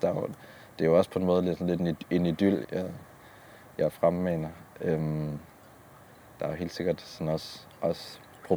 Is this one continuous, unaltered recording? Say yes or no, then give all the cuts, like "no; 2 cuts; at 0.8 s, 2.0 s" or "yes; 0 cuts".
no; 1 cut; at 2.6 s